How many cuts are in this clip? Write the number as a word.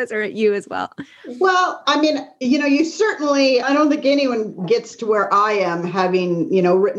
one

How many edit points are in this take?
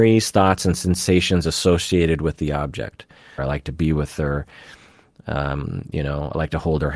one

